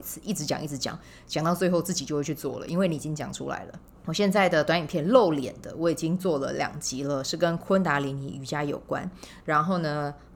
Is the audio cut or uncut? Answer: cut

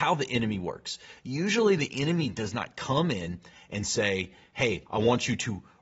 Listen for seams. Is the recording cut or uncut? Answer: uncut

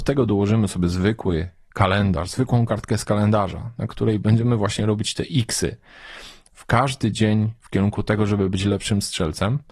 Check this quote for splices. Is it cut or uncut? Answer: cut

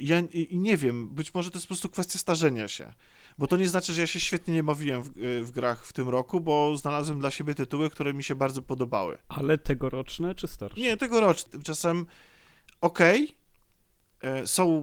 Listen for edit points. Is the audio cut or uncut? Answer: cut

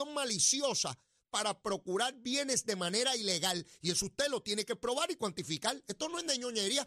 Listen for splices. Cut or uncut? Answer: uncut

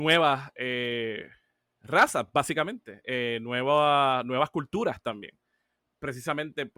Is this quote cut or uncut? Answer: uncut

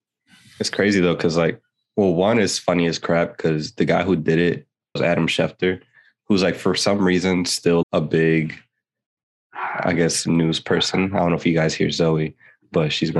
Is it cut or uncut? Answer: cut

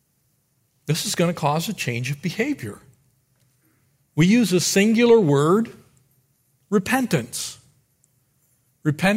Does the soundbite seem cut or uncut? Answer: uncut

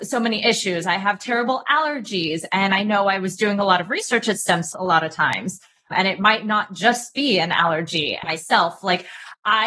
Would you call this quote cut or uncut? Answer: cut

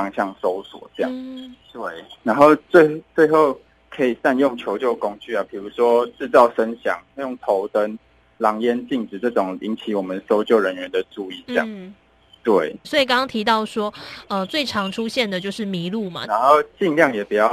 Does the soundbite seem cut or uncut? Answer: cut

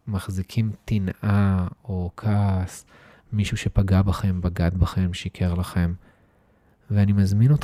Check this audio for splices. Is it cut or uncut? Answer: uncut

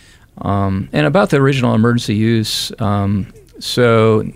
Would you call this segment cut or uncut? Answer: uncut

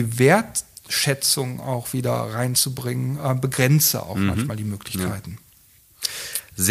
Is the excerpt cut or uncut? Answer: uncut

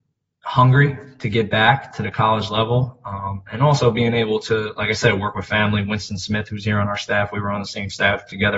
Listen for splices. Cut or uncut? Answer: uncut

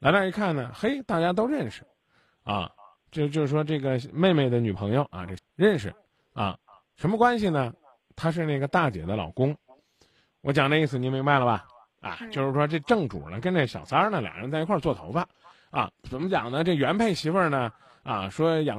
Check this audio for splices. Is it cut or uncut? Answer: cut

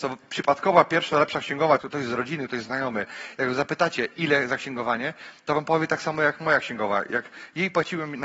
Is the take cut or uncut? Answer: cut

